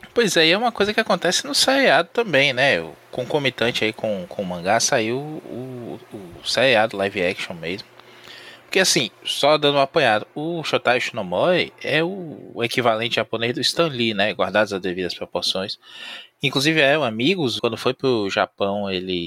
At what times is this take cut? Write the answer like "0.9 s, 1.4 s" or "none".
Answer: 17.6 s